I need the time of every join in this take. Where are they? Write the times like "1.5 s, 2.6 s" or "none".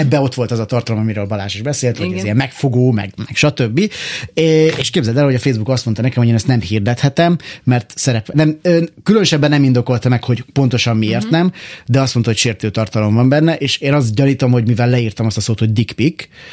none